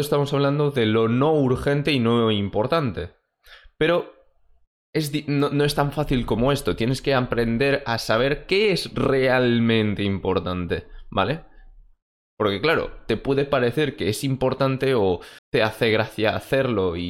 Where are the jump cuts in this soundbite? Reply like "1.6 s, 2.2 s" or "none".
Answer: 15.4 s

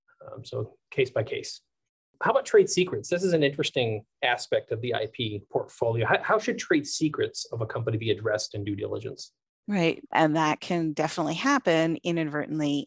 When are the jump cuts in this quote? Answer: 10.1 s

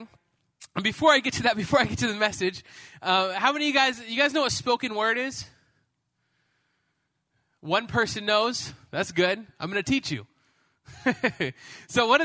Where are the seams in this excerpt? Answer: none

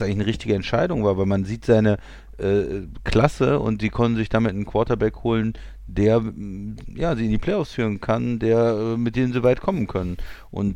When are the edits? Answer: none

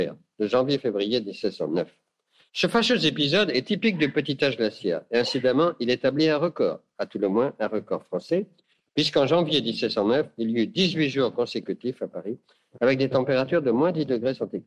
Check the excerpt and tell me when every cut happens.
2.5 s

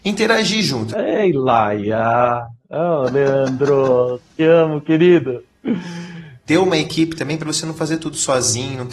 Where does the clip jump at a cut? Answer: 0.9 s, 6.5 s

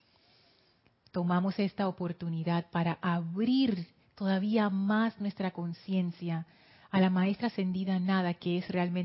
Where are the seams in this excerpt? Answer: none

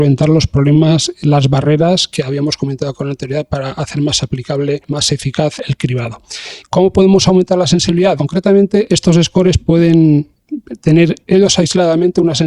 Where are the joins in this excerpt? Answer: 6.6 s, 8.2 s

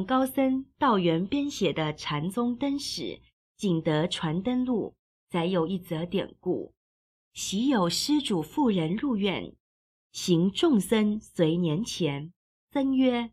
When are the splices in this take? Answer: none

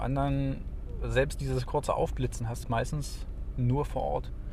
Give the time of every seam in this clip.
2.6 s

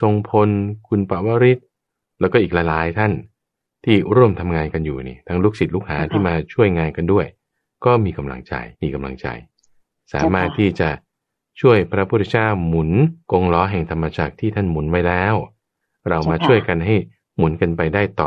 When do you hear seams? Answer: 8.7 s, 13.2 s

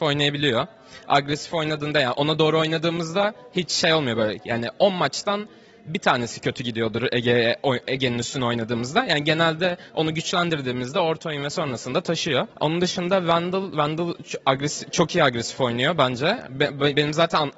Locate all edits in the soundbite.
12.5 s

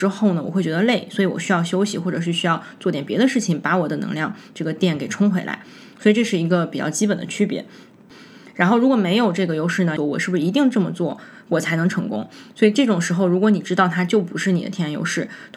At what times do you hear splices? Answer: 10.0 s

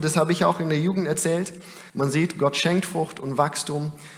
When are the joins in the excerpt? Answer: 1.9 s

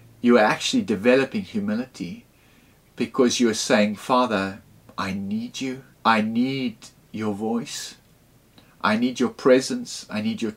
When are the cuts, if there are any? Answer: 5.9 s

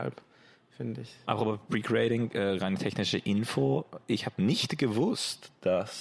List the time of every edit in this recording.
1.2 s

